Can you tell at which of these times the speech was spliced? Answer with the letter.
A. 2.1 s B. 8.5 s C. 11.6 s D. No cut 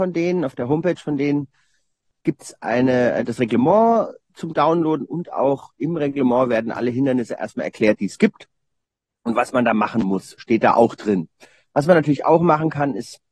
C